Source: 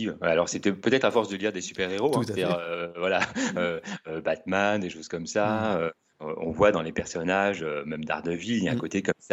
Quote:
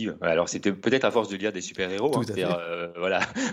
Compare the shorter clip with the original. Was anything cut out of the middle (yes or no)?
no